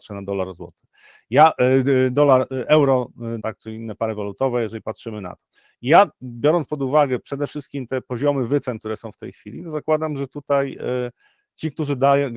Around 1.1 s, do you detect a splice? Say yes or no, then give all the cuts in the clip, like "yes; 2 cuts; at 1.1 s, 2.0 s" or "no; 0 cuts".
no; 1 cut; at 3.4 s